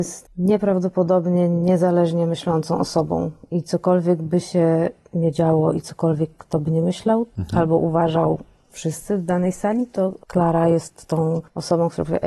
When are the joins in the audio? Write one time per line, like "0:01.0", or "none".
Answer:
none